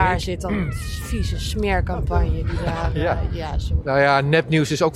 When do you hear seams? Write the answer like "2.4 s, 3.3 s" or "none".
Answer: 3.8 s